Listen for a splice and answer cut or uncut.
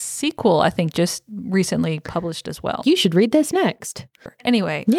cut